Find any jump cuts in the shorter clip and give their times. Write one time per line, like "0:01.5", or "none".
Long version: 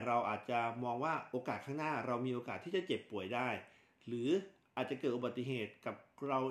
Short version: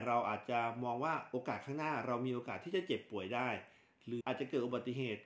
0:04.2